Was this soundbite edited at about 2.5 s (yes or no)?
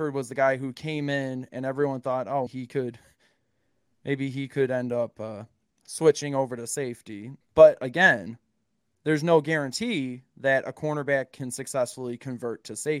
yes